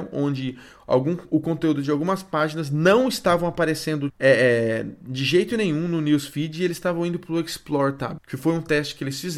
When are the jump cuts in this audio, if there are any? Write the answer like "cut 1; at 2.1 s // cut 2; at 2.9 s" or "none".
cut 1; at 4.1 s // cut 2; at 8.2 s